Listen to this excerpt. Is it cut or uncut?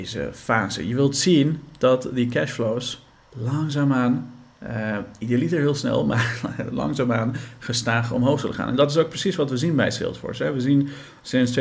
uncut